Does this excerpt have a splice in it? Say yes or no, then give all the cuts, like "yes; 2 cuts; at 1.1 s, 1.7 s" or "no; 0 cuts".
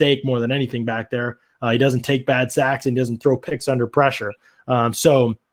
no; 0 cuts